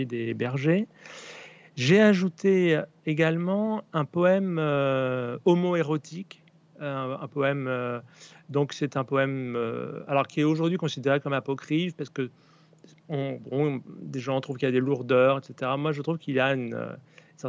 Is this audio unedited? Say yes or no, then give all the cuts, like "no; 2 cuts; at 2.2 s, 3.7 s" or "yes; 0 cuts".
yes; 0 cuts